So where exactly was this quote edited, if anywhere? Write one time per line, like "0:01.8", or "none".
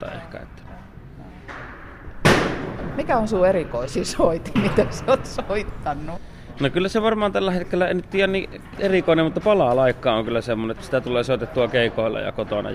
0:10.8

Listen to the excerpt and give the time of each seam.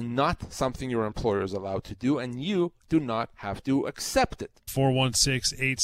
0:04.7

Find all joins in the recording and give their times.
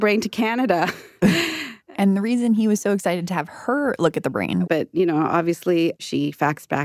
0:04.7
0:06.0

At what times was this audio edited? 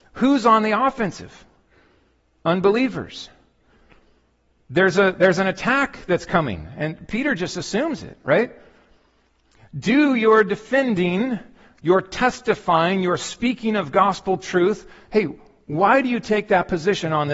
none

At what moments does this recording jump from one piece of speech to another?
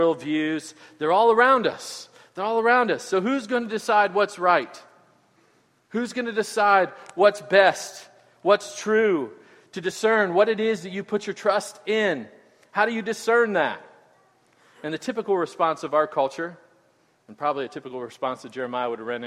none

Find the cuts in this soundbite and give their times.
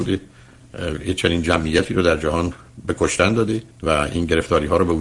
0:03.7

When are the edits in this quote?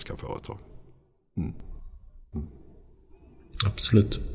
0:02.3

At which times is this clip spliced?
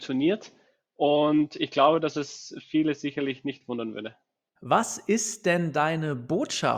0:04.5

